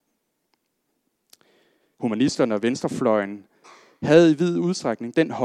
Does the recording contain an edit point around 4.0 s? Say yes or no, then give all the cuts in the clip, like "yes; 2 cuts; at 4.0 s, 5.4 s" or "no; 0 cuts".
no; 1 cut; at 1.9 s